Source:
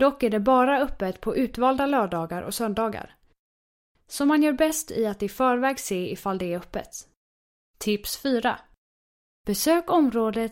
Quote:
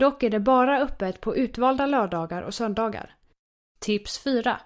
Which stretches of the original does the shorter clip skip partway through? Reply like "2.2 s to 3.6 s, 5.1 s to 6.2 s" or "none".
3.6 s to 7.6 s